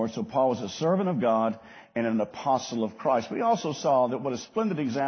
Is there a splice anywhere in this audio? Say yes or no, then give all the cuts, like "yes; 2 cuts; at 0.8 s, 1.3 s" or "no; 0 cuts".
no; 0 cuts